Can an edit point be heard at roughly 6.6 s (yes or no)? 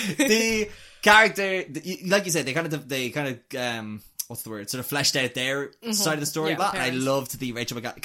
yes